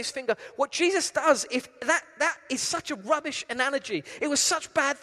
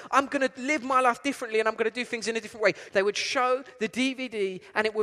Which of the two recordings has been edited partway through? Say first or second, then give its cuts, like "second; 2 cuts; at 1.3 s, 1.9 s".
second; 1 cut; at 2.9 s